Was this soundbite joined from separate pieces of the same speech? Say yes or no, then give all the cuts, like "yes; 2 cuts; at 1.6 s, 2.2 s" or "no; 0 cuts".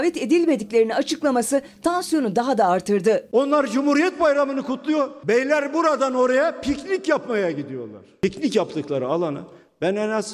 no; 0 cuts